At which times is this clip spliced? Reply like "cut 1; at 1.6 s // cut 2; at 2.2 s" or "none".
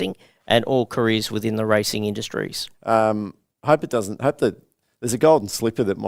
cut 1; at 2.7 s